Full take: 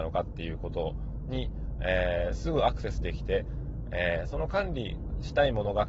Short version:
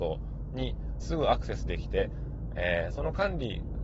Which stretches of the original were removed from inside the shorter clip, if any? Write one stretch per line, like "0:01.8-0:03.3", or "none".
0:01.8-0:02.4